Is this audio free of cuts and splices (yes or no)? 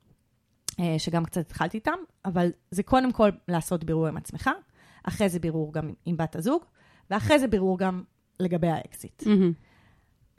yes